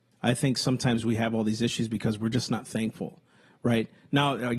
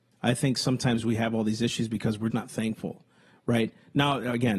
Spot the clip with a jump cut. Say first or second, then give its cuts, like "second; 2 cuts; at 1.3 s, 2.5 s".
second; 1 cut; at 2.3 s